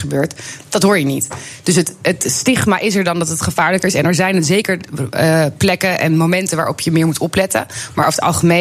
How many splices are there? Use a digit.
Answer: 0